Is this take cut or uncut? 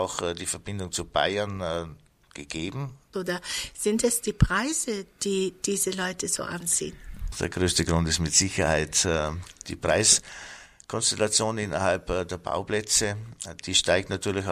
cut